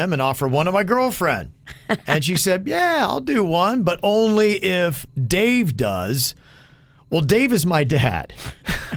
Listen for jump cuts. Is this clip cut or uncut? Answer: uncut